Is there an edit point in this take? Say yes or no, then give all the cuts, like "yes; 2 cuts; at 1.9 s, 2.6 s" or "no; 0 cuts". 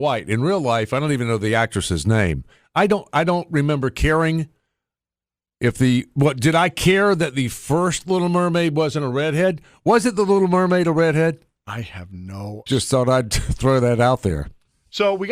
yes; 1 cut; at 12.7 s